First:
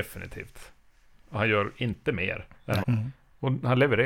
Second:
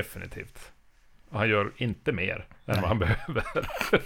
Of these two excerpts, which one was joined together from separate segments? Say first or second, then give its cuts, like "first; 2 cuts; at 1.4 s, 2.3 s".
first; 1 cut; at 2.8 s